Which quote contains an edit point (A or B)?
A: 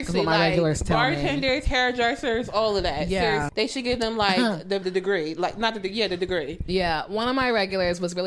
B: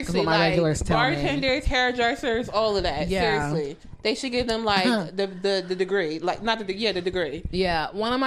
A